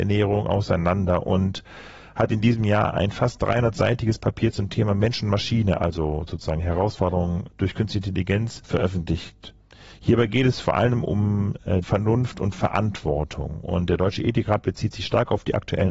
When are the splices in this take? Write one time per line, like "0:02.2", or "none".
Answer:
0:11.8